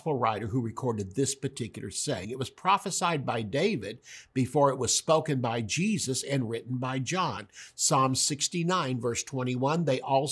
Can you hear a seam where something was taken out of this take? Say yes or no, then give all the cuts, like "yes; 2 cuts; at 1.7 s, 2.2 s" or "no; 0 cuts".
no; 0 cuts